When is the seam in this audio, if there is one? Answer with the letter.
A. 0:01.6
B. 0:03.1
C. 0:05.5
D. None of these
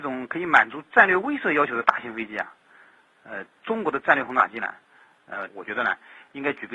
C